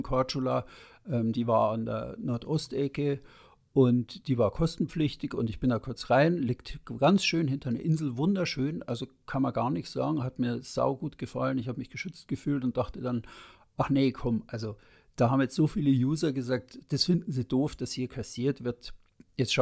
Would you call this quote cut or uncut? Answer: uncut